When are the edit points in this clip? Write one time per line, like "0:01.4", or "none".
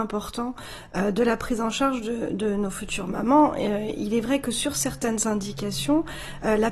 none